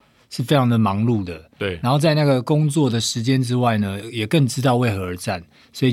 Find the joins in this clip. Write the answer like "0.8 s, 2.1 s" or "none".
none